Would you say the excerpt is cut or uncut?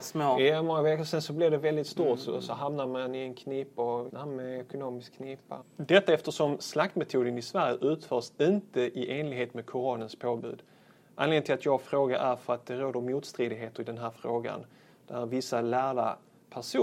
cut